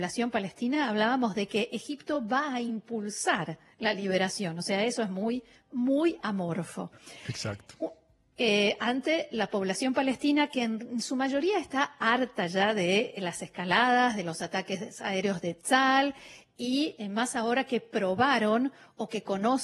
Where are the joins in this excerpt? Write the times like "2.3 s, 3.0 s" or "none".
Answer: none